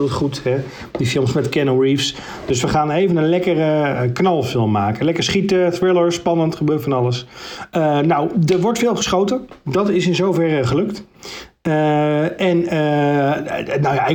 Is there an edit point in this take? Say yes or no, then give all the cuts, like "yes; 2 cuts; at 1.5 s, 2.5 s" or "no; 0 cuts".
no; 0 cuts